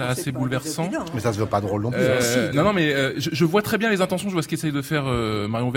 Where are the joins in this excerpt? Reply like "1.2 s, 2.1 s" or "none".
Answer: none